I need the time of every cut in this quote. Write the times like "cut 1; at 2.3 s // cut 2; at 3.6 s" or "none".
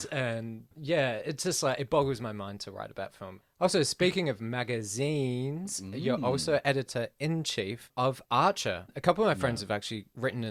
none